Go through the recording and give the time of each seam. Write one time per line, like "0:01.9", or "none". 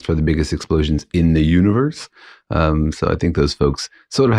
none